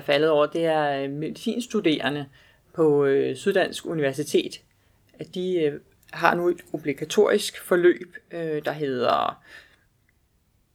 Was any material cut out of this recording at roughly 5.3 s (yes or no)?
no